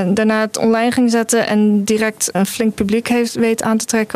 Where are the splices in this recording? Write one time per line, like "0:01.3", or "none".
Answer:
0:02.3